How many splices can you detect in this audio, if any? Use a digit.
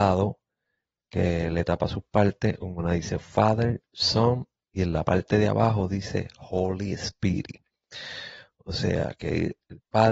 0